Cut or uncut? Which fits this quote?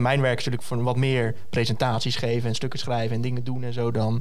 uncut